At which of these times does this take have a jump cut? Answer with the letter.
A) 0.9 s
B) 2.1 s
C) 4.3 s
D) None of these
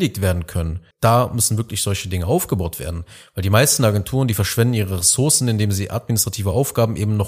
A